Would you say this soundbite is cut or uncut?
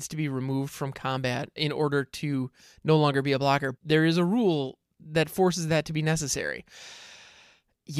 cut